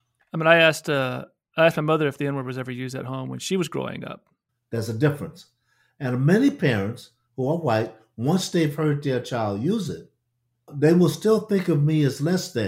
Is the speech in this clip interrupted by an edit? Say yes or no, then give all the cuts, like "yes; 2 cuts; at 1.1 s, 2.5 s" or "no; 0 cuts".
yes; 2 cuts; at 4.5 s, 10.7 s